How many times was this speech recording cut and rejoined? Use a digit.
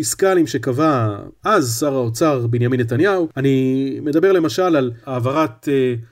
0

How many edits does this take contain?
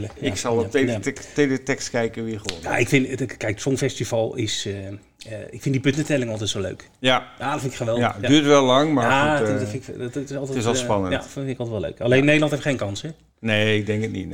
0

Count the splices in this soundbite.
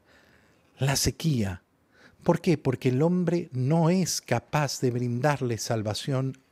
0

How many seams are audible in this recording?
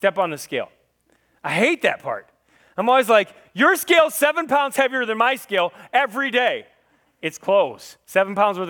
0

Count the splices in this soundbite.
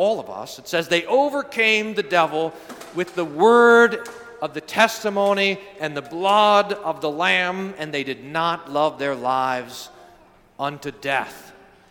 0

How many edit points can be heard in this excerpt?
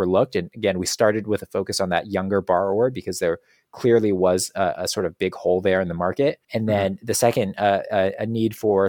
1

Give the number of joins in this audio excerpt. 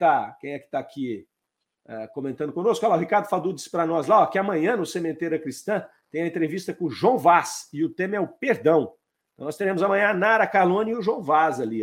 0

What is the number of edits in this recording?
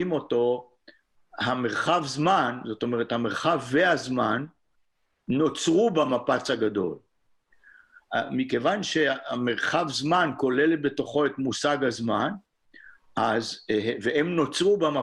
0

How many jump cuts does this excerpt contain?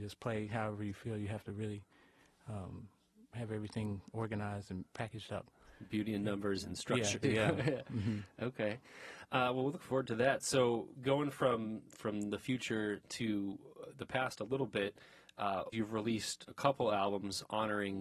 2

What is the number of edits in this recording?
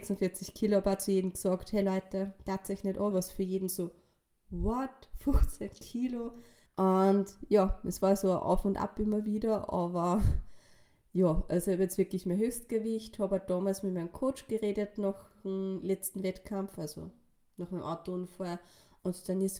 2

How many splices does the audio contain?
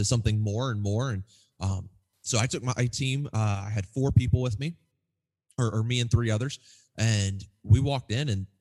0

